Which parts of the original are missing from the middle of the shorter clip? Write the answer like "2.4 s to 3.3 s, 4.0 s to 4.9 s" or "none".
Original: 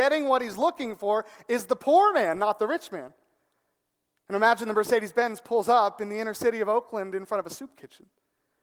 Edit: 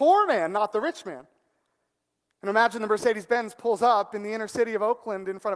none